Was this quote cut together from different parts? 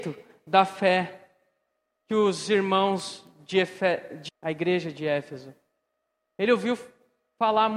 yes; 1 cut; at 4.3 s

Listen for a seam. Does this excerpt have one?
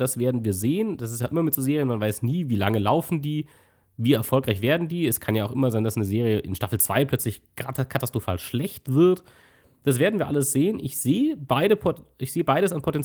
no; 0 cuts

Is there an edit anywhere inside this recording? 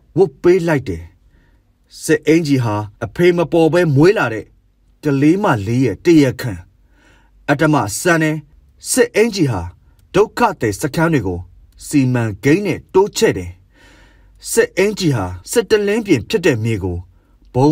yes; 2 cuts; at 3.0 s, 15.4 s

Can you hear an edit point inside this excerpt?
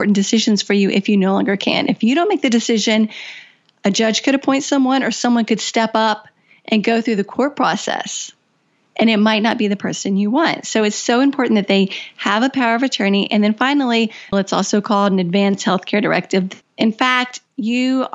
yes; 2 cuts; at 14.3 s, 16.6 s

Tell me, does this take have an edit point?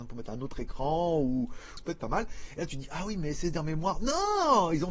yes; 1 cut; at 1.8 s

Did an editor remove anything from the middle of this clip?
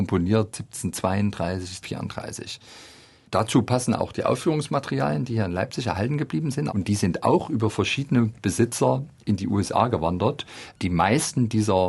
yes; 2 cuts; at 1.8 s, 6.7 s

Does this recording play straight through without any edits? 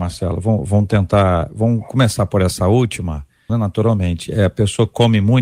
no; 1 cut; at 3.5 s

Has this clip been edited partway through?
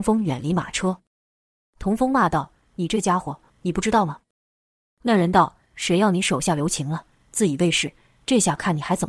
yes; 1 cut; at 3.5 s

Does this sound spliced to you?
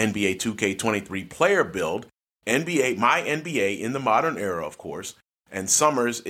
no; 0 cuts

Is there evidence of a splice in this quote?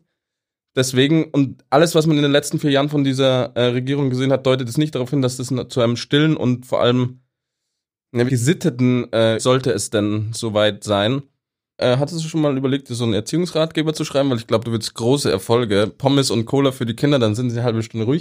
yes; 3 cuts; at 8.3 s, 9.4 s, 11.8 s

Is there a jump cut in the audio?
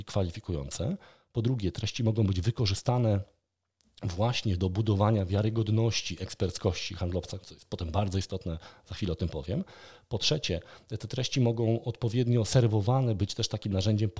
no; 0 cuts

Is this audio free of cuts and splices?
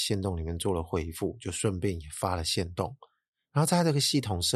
yes; 0 cuts

